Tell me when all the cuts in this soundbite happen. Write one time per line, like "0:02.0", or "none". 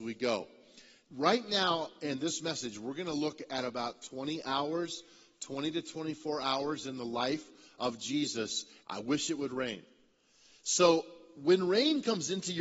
0:01.1
0:08.8